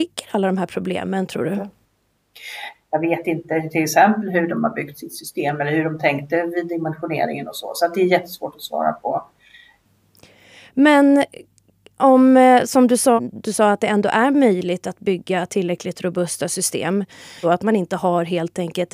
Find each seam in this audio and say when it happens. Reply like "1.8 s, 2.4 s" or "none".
2.7 s, 13.2 s, 17.4 s